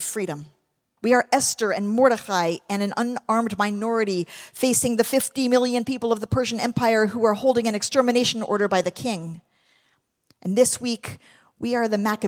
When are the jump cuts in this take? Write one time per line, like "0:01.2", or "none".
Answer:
0:01.0